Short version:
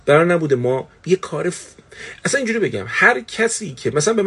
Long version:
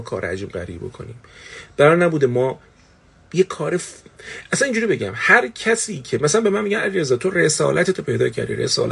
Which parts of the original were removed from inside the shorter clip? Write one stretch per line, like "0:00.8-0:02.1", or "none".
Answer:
0:02.7-0:03.2